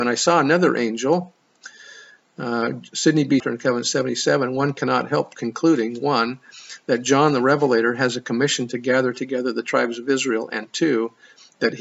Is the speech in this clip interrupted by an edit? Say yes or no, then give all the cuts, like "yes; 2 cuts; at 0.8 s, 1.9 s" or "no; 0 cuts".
yes; 1 cut; at 3.4 s